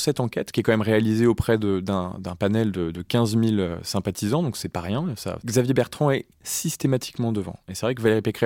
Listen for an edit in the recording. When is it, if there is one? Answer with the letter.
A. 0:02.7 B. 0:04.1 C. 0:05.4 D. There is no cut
C